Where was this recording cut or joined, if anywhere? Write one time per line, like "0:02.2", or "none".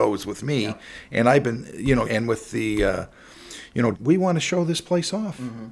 0:02.0
0:03.9